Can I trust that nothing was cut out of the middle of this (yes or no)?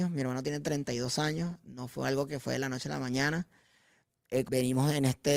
no